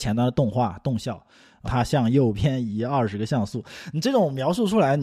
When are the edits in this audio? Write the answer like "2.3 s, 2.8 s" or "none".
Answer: 1.6 s